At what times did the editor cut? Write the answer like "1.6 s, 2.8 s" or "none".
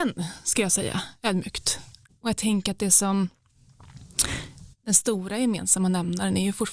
2.1 s